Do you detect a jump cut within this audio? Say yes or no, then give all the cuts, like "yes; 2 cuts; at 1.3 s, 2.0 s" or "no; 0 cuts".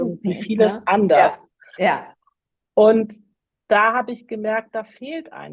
no; 0 cuts